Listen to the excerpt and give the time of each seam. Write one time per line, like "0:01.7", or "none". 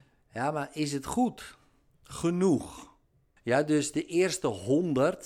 0:03.4